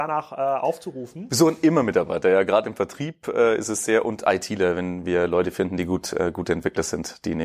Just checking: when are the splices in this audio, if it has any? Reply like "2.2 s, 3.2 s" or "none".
none